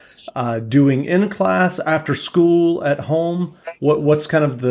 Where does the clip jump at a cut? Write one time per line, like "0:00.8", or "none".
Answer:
none